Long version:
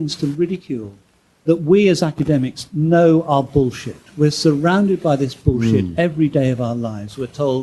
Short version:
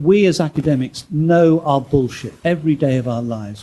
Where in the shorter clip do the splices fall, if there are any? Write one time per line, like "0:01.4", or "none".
0:02.4